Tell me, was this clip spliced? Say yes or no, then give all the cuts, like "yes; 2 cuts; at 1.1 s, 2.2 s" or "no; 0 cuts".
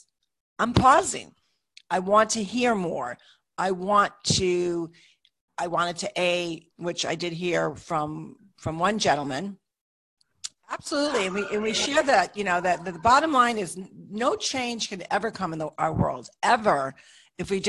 yes; 2 cuts; at 6.7 s, 10.5 s